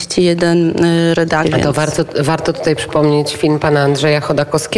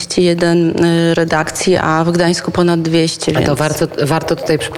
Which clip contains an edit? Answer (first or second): first